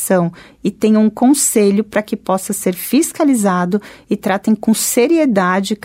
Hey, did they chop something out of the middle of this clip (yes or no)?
no